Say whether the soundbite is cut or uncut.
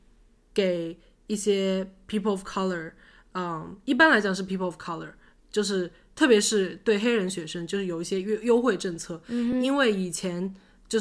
uncut